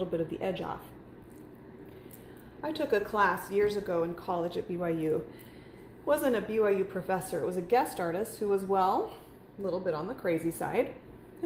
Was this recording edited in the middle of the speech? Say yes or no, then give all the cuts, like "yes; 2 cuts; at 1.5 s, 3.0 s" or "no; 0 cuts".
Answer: no; 0 cuts